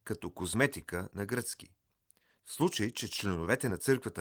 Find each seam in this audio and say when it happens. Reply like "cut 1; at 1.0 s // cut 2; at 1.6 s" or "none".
cut 1; at 2.4 s